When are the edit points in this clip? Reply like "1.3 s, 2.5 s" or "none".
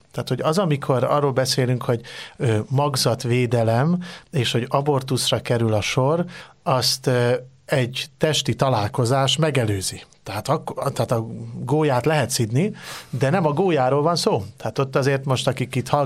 none